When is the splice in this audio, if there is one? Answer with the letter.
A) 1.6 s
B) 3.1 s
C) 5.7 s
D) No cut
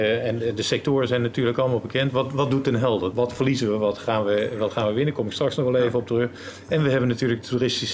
B